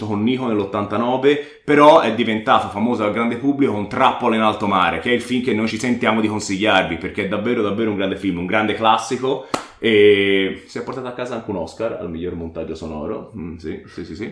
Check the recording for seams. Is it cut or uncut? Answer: uncut